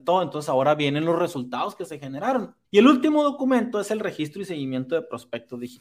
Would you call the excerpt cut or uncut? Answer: cut